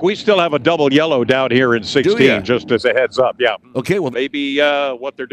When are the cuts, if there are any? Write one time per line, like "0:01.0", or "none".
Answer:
0:04.1